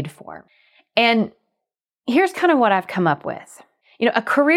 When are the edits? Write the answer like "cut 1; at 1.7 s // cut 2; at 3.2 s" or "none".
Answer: none